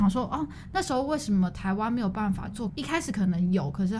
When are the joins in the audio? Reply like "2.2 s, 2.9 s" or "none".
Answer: 2.7 s